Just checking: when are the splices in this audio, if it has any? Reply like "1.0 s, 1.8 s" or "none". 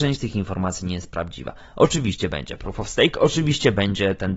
none